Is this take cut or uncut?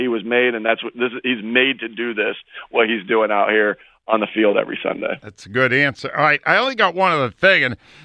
uncut